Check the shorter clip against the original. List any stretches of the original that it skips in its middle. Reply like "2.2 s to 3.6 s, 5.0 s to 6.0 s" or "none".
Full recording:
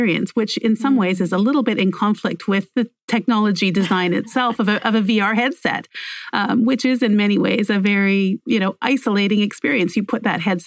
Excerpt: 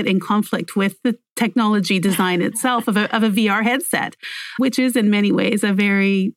6.3 s to 6.6 s